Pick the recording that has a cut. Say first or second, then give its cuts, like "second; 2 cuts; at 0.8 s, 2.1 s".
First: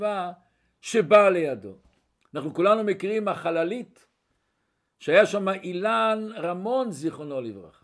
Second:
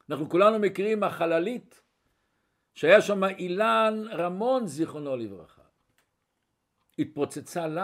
first; 1 cut; at 2.2 s